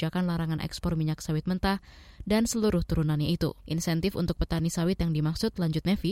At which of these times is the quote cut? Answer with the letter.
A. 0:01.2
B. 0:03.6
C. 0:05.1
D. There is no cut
B